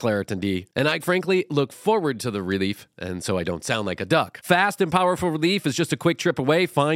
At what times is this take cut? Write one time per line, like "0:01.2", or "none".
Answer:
0:01.0